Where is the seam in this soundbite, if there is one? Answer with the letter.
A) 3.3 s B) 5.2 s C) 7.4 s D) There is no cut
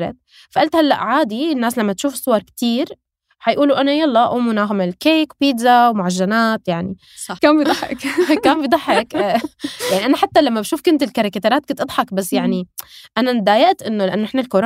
C